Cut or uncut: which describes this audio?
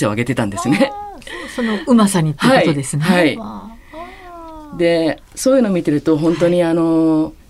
uncut